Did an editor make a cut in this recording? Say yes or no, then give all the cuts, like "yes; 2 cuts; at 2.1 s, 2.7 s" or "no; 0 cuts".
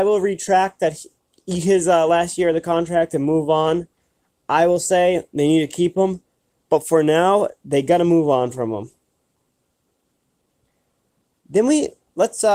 no; 0 cuts